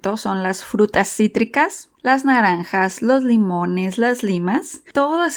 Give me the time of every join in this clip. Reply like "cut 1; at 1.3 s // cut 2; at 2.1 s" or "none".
cut 1; at 2.0 s